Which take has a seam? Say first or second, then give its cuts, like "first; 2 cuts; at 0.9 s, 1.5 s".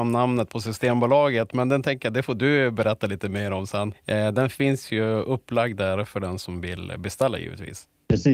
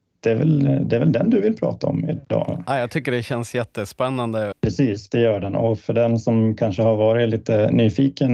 second; 1 cut; at 4.5 s